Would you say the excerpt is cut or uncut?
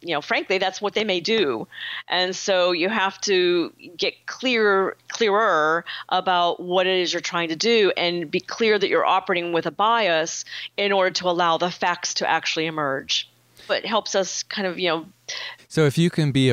cut